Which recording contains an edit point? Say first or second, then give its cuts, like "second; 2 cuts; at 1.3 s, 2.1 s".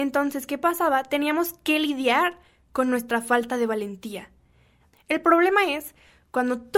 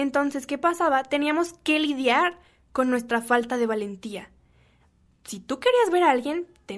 first; 1 cut; at 4.9 s